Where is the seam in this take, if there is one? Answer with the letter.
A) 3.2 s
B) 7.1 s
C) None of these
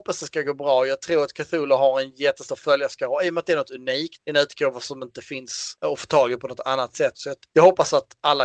B